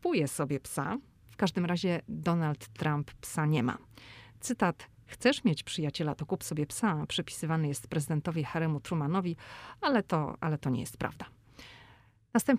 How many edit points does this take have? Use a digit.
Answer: 1